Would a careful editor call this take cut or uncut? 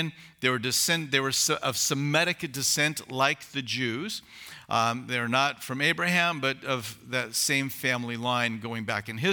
uncut